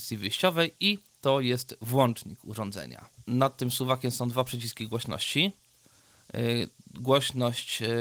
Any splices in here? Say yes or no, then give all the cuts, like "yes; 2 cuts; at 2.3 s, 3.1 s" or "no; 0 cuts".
no; 0 cuts